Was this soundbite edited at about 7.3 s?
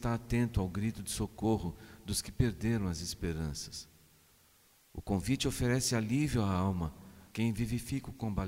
yes; 1 cut; at 7.3 s

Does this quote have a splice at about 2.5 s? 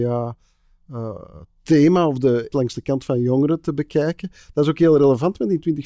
yes; 1 cut; at 2.5 s

